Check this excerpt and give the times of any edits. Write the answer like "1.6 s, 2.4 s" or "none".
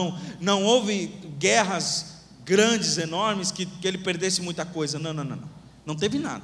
none